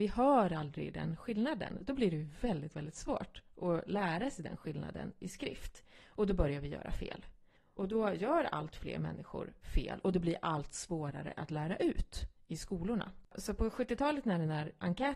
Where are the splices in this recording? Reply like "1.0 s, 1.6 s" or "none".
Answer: 7.8 s